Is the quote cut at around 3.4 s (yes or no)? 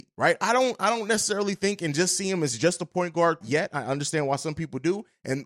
yes